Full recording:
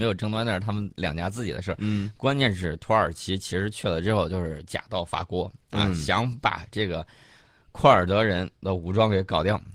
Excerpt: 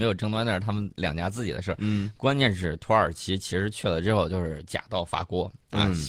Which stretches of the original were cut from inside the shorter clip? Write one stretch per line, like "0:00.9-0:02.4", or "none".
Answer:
none